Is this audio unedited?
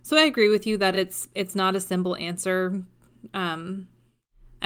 yes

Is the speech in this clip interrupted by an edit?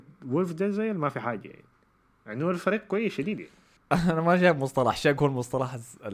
no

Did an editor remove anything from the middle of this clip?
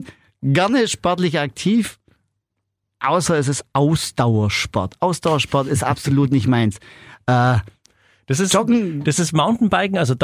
no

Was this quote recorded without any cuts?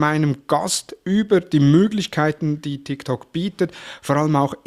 yes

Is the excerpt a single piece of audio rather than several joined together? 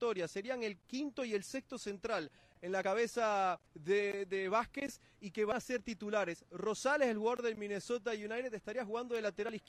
no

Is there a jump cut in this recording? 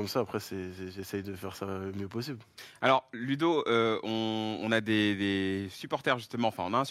no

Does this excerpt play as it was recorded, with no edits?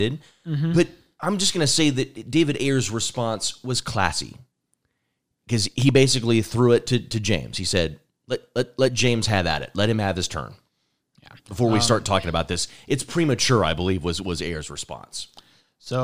yes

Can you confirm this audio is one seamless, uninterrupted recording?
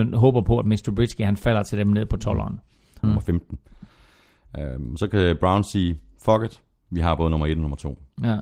no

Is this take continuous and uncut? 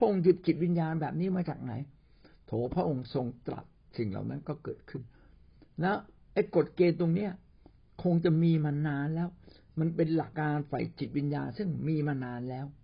no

